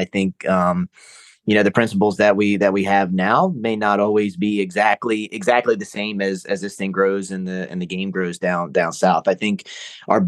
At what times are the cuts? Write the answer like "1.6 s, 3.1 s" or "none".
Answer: none